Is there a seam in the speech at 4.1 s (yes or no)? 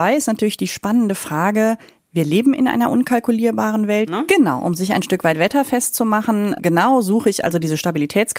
yes